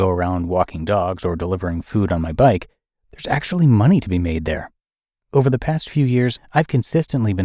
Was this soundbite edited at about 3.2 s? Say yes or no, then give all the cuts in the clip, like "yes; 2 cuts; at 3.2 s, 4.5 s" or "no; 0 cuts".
no; 1 cut; at 5.2 s